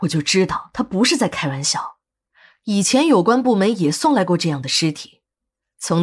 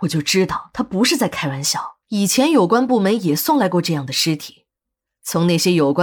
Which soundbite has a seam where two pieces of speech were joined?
second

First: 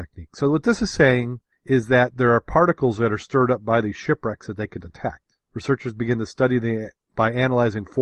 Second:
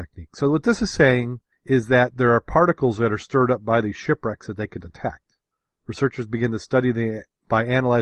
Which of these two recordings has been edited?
first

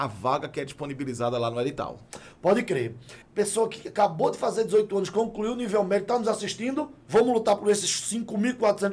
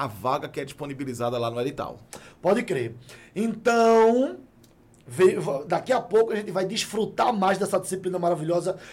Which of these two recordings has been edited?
first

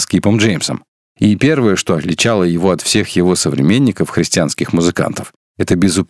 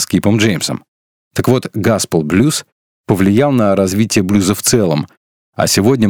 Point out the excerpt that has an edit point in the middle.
first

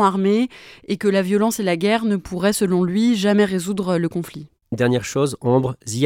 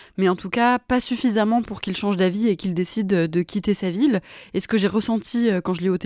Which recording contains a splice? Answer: first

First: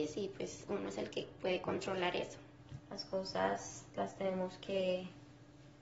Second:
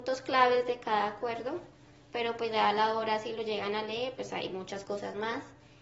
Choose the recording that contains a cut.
first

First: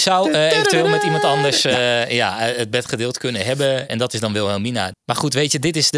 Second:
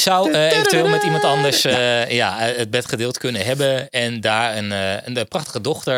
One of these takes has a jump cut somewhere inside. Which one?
first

